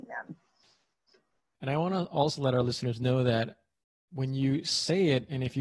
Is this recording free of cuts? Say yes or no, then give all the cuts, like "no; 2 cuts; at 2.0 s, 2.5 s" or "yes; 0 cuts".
no; 1 cut; at 1.6 s